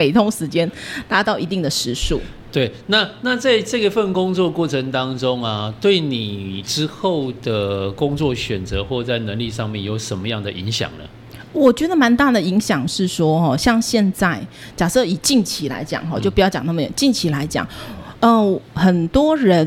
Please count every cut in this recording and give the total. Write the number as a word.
one